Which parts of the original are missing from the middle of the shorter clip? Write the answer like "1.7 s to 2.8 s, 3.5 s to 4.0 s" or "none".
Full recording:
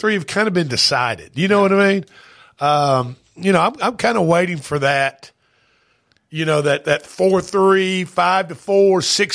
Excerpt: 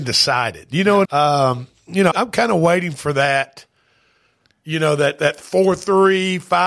1.7 s to 2.5 s, 3.6 s to 3.8 s